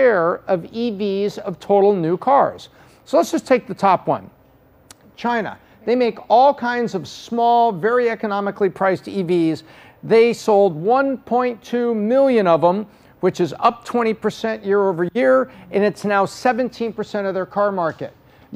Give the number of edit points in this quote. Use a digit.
0